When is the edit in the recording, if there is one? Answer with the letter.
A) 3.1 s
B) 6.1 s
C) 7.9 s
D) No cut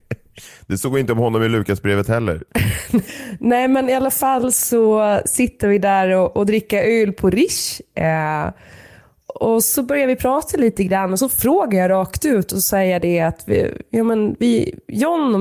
A